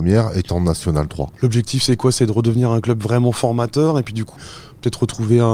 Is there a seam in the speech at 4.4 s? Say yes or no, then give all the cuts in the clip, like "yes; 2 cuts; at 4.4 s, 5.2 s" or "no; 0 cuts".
yes; 2 cuts; at 1.4 s, 4.4 s